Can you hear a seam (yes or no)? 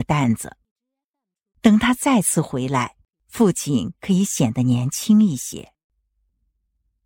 no